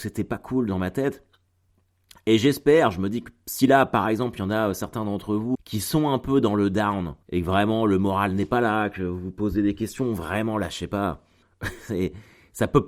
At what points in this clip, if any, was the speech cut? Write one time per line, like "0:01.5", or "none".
0:05.5
0:07.2
0:11.4